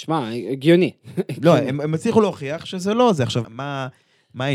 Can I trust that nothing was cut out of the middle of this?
no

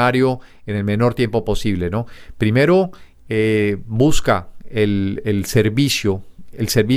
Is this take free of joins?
yes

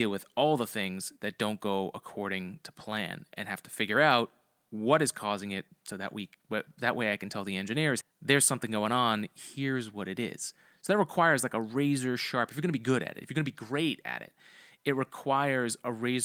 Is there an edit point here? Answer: yes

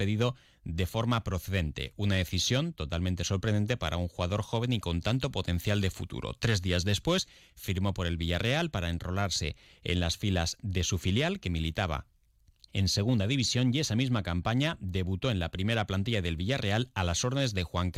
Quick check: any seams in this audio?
no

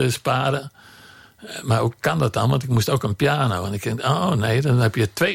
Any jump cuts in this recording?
no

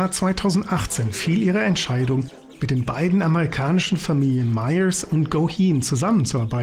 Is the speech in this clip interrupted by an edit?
no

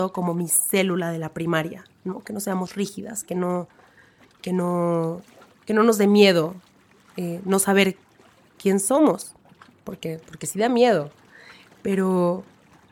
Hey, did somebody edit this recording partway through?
no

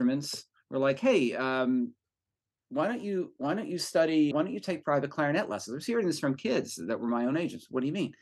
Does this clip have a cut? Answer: yes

